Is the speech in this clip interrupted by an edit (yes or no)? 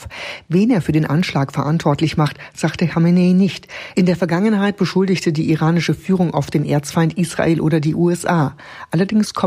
no